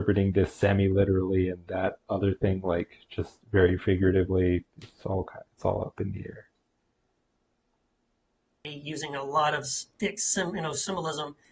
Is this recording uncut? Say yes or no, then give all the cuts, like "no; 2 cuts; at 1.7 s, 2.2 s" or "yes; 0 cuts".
yes; 0 cuts